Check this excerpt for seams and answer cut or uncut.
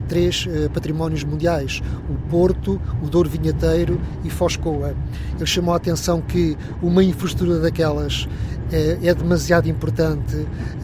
cut